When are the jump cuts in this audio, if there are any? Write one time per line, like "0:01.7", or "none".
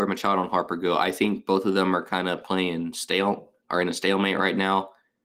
none